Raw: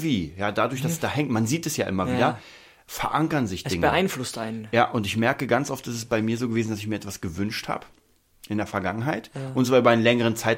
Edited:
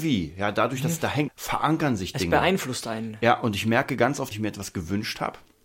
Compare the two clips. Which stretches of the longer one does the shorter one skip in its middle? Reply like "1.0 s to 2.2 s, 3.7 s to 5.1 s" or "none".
1.3 s to 2.8 s, 5.8 s to 6.8 s